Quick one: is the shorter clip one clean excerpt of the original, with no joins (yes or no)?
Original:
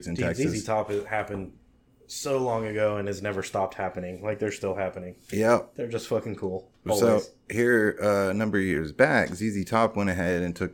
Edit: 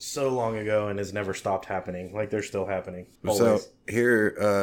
no